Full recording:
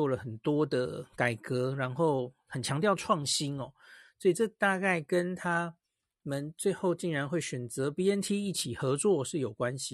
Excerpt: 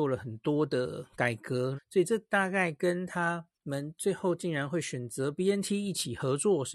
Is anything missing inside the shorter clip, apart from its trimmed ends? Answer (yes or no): yes